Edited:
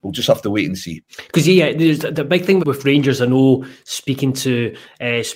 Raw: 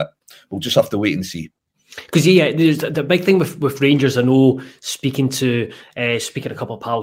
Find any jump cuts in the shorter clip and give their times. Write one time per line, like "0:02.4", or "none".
0:01.1
0:02.6